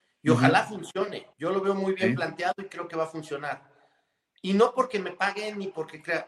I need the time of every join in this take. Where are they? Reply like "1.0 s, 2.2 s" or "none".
1.3 s